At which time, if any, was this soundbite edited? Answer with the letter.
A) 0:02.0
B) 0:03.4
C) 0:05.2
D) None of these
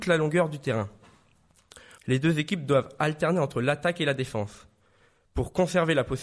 A